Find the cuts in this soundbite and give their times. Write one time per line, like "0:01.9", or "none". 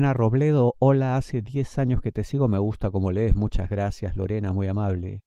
none